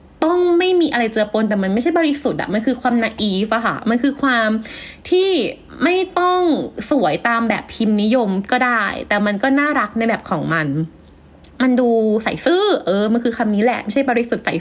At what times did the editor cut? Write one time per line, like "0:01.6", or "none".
none